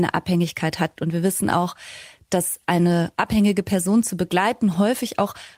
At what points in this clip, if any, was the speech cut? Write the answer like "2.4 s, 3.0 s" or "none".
1.0 s